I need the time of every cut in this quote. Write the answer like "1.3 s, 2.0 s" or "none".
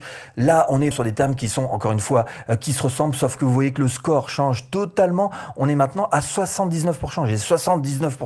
0.9 s